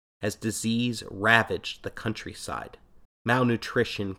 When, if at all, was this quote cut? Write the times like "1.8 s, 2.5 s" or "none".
3.1 s